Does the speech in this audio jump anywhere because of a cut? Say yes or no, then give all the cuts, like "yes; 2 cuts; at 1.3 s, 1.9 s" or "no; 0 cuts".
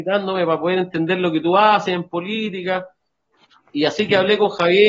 no; 0 cuts